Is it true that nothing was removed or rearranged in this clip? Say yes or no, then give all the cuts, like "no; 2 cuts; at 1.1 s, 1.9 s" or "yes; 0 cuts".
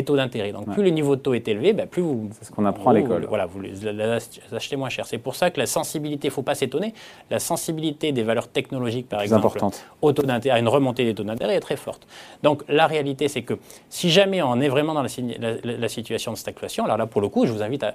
yes; 0 cuts